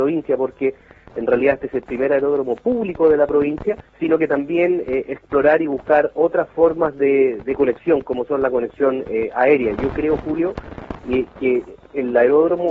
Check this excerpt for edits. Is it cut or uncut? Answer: cut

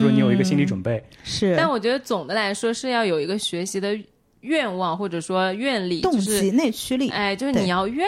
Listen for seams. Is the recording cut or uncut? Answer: uncut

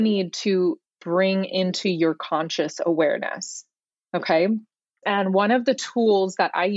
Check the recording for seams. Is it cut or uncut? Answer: cut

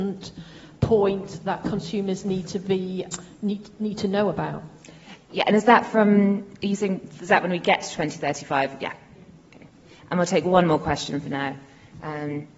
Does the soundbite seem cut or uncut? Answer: uncut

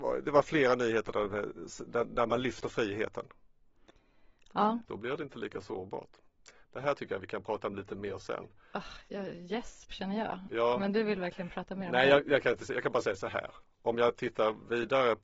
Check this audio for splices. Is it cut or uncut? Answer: cut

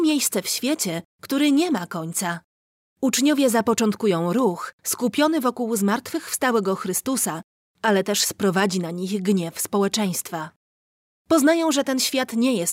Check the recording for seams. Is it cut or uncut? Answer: cut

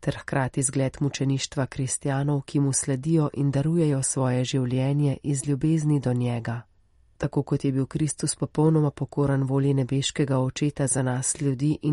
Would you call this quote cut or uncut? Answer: uncut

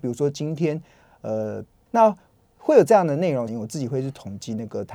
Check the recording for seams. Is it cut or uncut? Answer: cut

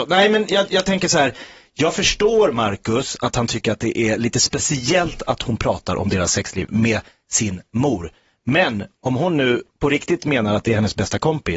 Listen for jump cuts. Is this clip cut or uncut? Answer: uncut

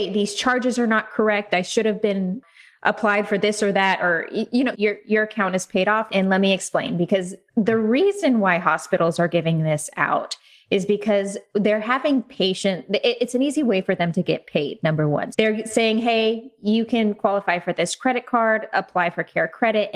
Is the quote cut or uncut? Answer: cut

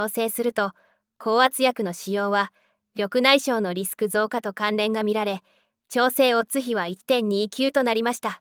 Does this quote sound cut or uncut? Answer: uncut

